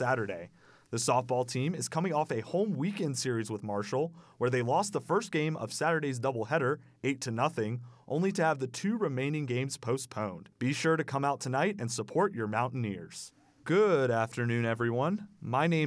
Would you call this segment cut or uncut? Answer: cut